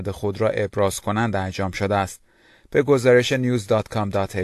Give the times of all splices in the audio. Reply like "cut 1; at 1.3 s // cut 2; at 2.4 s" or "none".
none